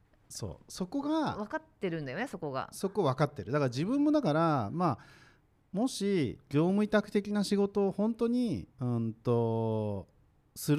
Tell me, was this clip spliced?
yes; 1 cut; at 8.7 s

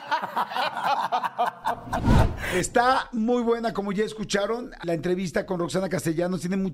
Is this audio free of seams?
no; 1 cut; at 4.8 s

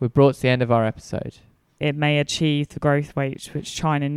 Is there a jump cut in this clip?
yes; 1 cut; at 1.8 s

